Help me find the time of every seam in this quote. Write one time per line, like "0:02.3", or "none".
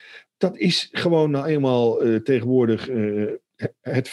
none

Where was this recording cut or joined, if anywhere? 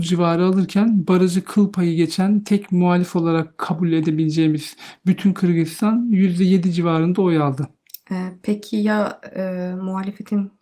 none

